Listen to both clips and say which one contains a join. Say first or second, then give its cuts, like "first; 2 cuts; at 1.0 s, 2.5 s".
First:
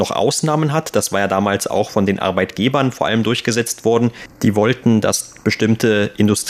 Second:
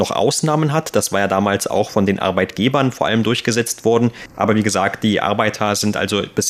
second; 1 cut; at 4.3 s